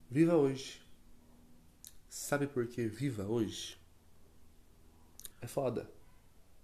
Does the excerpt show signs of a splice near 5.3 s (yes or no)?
yes